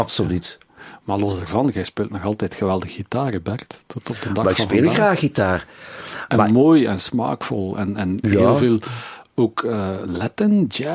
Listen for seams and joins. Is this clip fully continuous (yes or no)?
yes